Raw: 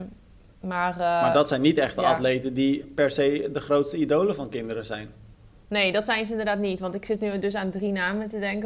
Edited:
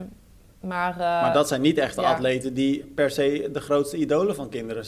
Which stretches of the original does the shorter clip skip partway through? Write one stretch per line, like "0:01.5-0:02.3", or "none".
none